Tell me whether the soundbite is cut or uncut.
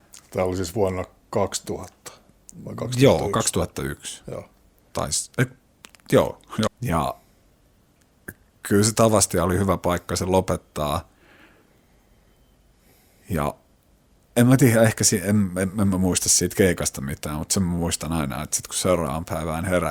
cut